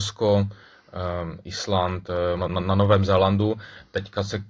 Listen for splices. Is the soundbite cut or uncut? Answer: cut